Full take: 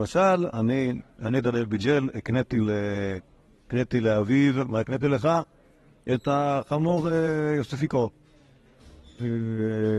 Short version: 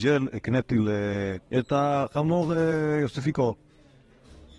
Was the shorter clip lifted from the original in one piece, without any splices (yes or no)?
no